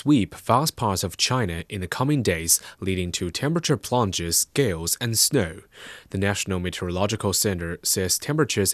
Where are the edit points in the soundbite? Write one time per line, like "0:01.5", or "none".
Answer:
none